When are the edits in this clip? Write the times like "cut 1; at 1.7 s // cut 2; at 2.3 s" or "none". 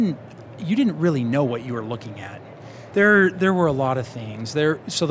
cut 1; at 2.9 s